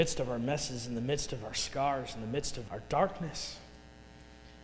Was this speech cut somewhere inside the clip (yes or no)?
yes